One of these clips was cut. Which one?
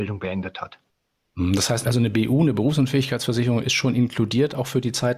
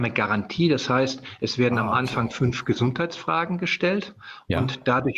first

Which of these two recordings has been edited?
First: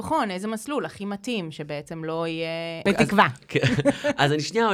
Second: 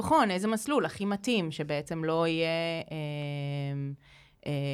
first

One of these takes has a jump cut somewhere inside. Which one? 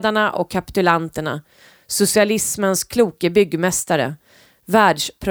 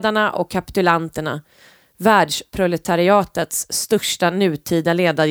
second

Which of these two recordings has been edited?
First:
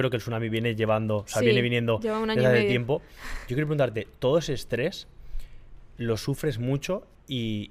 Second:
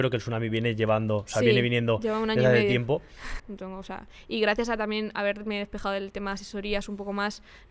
second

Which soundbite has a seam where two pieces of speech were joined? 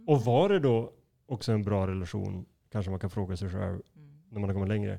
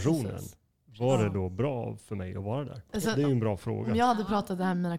second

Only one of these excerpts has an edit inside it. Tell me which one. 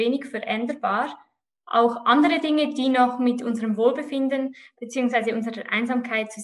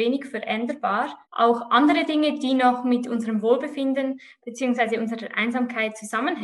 second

